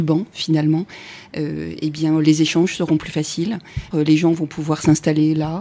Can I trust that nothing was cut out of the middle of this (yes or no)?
no